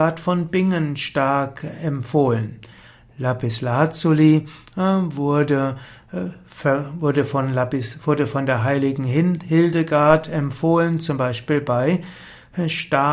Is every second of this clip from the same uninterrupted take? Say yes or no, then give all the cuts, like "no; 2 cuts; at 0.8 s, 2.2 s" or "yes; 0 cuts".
yes; 0 cuts